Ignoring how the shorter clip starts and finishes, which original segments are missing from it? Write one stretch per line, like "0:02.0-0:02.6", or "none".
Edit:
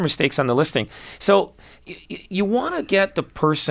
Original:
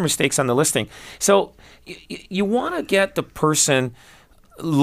none